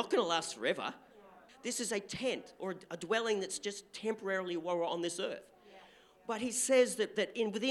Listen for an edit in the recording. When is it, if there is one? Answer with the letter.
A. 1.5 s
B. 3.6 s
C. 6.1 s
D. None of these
A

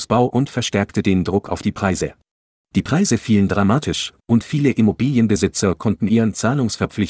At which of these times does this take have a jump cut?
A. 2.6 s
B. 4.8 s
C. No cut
A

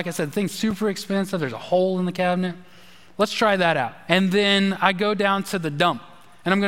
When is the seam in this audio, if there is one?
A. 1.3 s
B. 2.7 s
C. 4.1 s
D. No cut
C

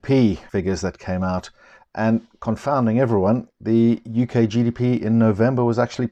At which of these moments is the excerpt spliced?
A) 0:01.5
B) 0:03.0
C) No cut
C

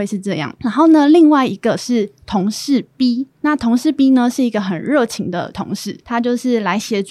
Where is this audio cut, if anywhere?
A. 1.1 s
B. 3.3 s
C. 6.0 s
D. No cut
C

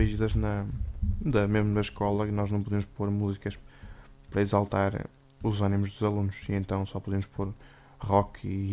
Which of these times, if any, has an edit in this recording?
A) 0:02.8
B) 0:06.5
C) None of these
C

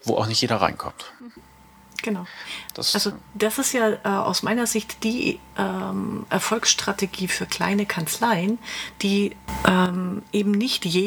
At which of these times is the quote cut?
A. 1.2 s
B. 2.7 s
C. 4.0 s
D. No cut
D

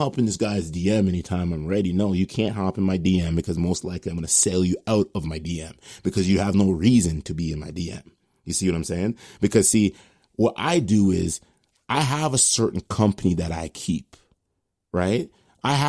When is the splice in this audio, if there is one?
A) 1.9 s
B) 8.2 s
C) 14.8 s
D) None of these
D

